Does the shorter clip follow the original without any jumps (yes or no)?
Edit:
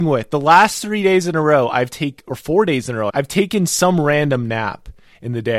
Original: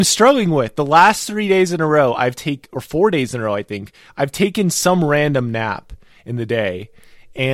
no